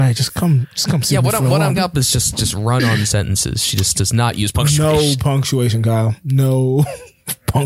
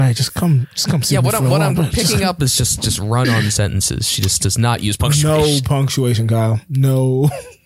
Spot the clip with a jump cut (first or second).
first